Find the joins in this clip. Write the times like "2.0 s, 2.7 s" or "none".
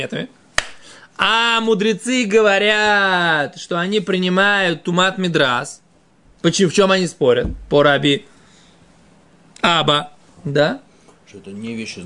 none